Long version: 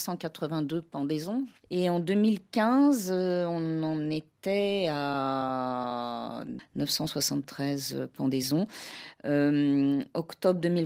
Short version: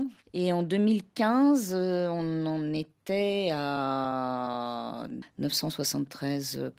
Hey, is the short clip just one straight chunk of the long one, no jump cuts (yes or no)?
yes